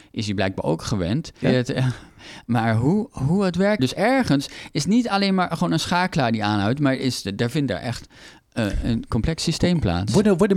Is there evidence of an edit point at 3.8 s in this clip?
yes; 2 cuts; at 1.4 s, 3.8 s

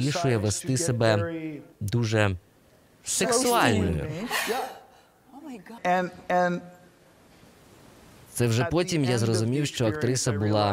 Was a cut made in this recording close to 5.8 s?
yes; 2 cuts; at 1.7 s, 5.8 s

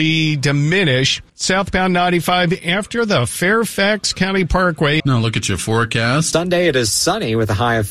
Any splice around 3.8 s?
no; 3 cuts; at 1.3 s, 5.0 s, 6.3 s

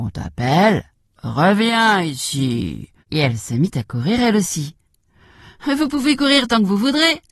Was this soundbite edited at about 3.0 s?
yes; 1 cut; at 3.0 s

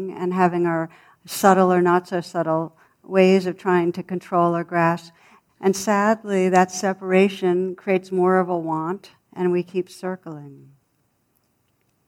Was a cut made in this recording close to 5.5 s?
yes; 2 cuts; at 5.5 s, 9.2 s

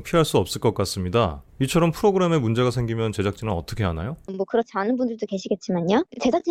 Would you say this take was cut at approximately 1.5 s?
no; 1 cut; at 4.3 s

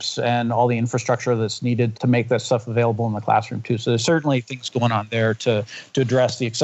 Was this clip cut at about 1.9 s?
yes; 1 cut; at 1.9 s

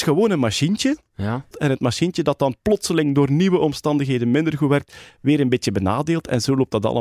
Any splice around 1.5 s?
yes; 1 cut; at 1.5 s

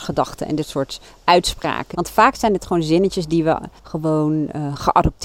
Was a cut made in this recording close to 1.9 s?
yes; 2 cuts; at 1.9 s, 3.8 s

